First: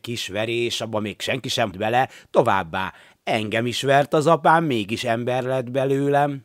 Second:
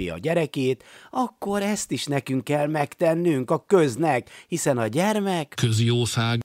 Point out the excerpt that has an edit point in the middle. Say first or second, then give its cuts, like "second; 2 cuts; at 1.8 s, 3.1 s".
first; 1 cut; at 1.7 s